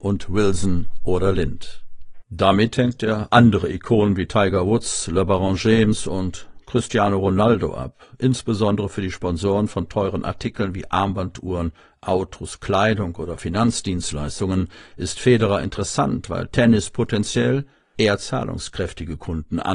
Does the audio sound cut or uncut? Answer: uncut